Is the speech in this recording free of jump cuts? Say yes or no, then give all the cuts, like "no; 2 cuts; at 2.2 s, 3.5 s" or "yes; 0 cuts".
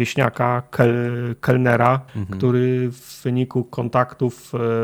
no; 1 cut; at 2.1 s